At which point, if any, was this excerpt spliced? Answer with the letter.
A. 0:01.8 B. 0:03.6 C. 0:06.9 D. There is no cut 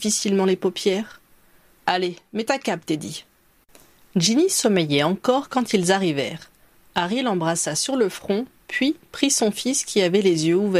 A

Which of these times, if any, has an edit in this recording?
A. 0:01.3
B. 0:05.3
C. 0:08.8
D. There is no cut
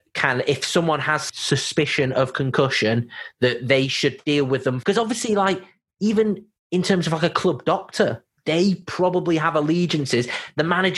D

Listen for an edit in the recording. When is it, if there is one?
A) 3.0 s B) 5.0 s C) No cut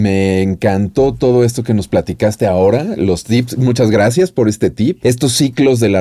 B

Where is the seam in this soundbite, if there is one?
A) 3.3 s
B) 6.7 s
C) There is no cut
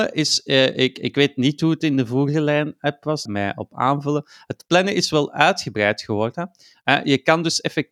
A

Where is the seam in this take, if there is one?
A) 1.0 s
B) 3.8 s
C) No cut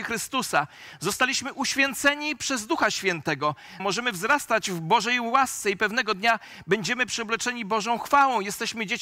B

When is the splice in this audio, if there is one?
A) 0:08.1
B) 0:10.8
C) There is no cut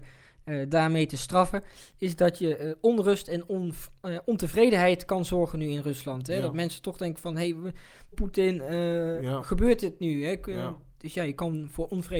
A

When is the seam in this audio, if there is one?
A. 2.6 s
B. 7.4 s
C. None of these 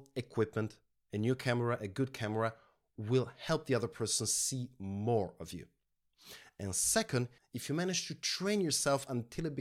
B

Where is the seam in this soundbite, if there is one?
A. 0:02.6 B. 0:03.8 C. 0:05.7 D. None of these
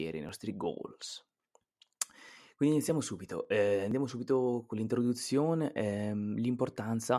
D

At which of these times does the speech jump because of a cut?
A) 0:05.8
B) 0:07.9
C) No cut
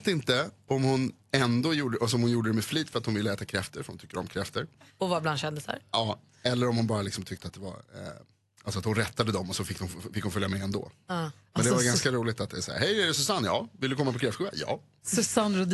C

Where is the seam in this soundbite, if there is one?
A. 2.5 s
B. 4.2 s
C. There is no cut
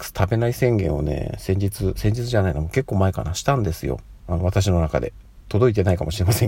B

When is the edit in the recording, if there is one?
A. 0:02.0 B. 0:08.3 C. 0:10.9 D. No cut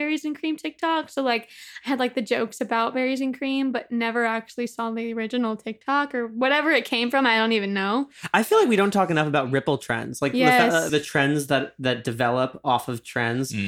C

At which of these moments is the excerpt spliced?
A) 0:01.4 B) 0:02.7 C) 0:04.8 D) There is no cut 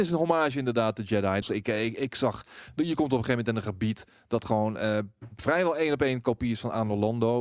A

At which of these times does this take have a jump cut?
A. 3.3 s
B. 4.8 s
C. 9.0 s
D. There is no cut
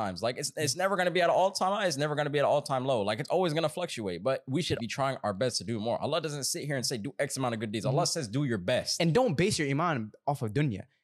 B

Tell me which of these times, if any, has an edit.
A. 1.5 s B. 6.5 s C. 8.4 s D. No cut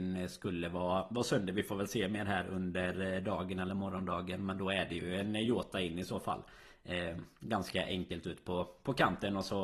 D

